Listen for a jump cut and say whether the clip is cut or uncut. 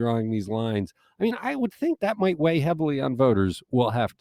cut